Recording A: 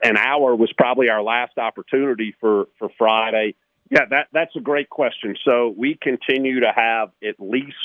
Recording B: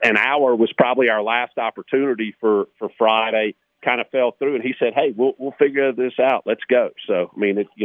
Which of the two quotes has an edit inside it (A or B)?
A